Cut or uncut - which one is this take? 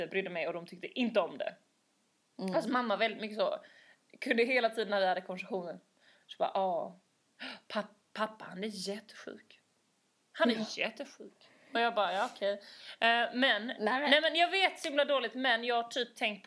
uncut